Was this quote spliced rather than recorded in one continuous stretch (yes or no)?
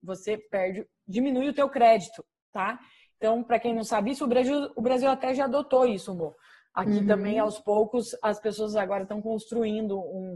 no